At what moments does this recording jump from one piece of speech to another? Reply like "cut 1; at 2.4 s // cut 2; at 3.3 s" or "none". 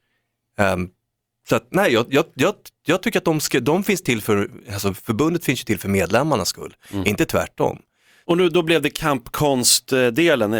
cut 1; at 8.2 s